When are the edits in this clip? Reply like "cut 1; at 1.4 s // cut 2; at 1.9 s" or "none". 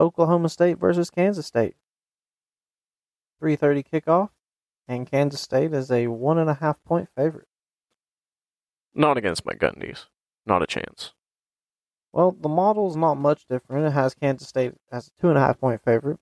none